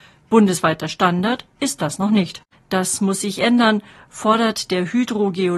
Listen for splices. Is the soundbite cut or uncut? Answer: cut